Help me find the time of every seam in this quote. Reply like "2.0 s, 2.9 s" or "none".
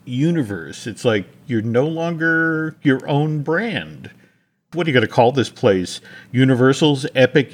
none